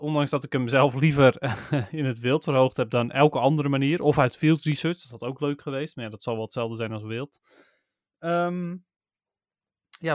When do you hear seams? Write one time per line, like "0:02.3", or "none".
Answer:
none